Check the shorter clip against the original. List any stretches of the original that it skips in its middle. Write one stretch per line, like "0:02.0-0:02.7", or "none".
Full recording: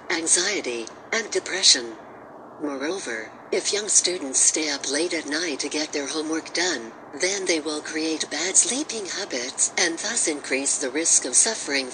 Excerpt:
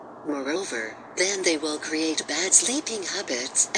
0:03.5-0:07.2